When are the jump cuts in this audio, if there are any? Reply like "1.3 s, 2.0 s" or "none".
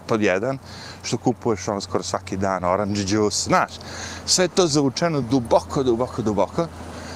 none